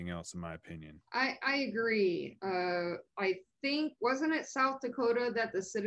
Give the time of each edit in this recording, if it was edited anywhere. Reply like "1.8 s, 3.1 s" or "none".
1.1 s